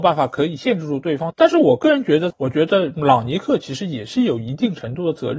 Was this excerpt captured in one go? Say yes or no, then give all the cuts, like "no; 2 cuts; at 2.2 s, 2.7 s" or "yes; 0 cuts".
no; 1 cut; at 2.3 s